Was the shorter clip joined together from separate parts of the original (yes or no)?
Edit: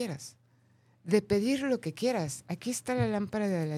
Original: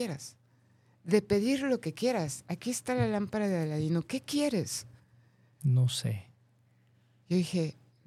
no